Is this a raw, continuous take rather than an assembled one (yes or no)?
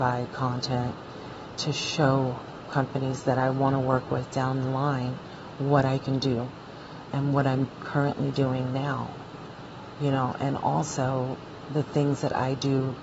yes